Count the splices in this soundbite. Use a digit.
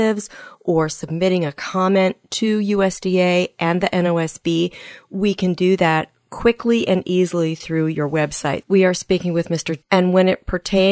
2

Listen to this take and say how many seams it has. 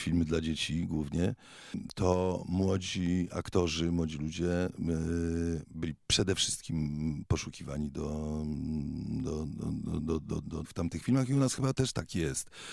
2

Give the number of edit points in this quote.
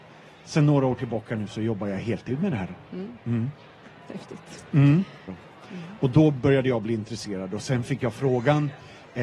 1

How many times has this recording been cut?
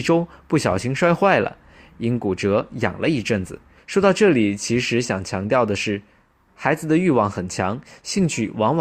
1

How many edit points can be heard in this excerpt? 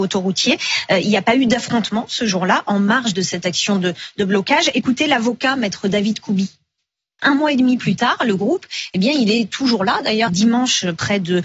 2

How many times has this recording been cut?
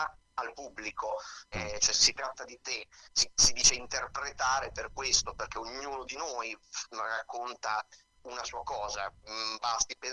1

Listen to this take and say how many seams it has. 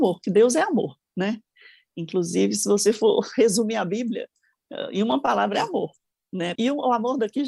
1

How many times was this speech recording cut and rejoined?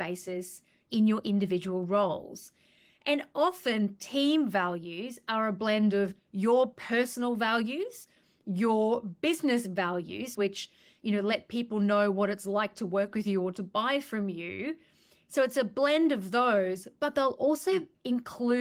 1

